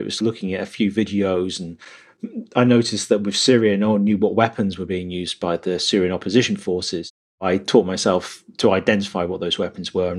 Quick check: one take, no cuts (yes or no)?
yes